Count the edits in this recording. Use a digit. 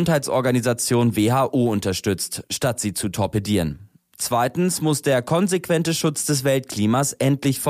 0